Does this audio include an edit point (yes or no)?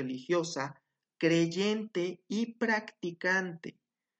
yes